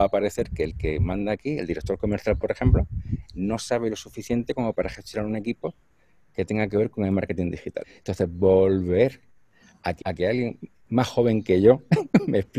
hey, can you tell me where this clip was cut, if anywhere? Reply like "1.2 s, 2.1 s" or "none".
7.8 s, 10.0 s